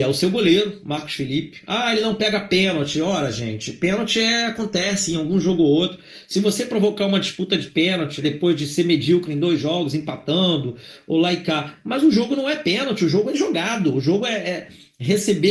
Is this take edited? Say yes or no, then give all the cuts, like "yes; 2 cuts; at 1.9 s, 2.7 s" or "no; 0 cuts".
yes; 1 cut; at 8.2 s